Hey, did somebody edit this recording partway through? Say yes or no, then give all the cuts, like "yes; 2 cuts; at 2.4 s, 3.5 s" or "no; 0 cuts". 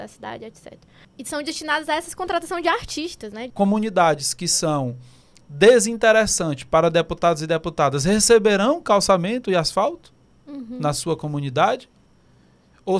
yes; 1 cut; at 3.5 s